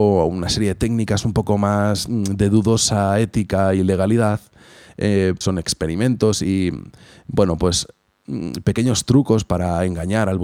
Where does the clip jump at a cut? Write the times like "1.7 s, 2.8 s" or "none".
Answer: 5.4 s